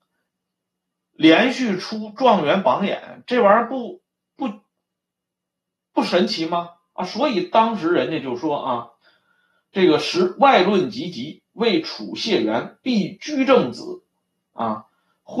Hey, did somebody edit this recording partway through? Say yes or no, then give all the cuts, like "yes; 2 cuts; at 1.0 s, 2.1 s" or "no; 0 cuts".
no; 0 cuts